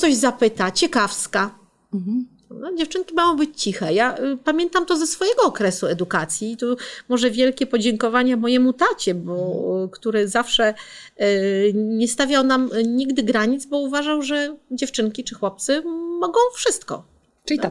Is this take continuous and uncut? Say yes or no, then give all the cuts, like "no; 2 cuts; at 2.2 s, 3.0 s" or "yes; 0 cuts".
yes; 0 cuts